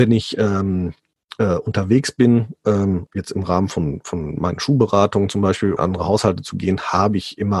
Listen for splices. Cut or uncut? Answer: cut